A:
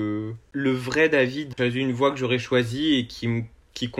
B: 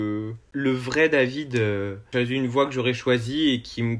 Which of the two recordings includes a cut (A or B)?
A